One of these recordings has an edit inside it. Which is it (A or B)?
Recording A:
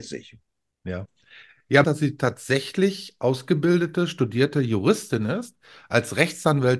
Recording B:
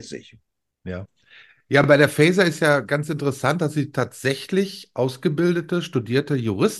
A